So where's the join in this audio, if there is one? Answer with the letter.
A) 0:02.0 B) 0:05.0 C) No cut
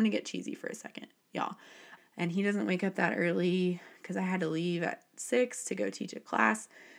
A